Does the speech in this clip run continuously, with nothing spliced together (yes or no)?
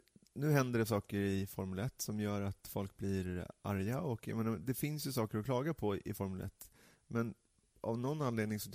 yes